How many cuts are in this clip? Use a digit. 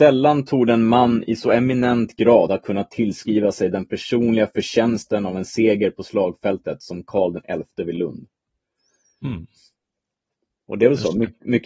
0